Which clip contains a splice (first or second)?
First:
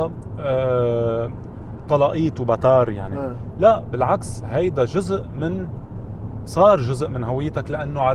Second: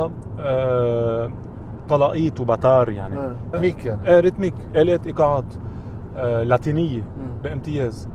second